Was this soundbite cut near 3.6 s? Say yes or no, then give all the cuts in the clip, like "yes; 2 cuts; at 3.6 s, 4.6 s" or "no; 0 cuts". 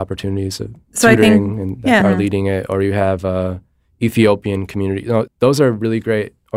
no; 2 cuts; at 2.0 s, 5.3 s